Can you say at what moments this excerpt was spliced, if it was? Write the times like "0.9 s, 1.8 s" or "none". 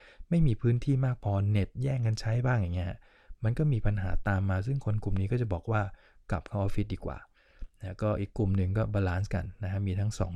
none